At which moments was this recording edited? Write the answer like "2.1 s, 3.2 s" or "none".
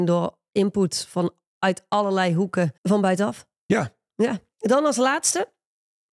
2.8 s, 4.5 s